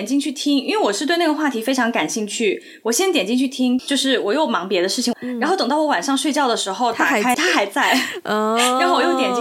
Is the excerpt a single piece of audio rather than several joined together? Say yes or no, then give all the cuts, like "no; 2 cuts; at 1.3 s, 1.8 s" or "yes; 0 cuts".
no; 3 cuts; at 3.8 s, 5.1 s, 7.3 s